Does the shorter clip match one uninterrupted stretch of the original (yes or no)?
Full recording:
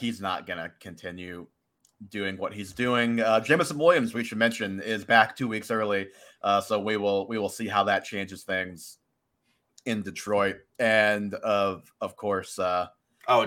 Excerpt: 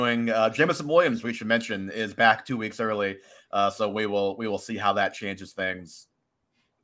yes